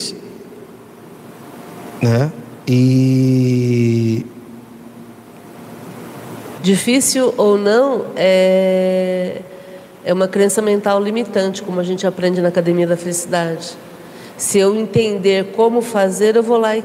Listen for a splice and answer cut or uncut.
cut